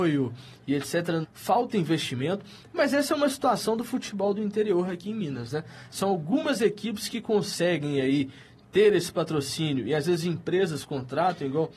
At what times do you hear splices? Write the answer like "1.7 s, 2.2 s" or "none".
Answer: 1.2 s